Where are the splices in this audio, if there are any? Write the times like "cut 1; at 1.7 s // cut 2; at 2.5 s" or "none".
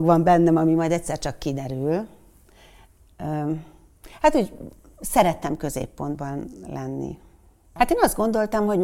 cut 1; at 3.1 s // cut 2; at 7.8 s